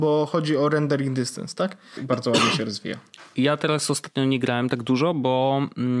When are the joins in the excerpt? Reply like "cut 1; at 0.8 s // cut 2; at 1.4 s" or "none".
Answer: cut 1; at 2.0 s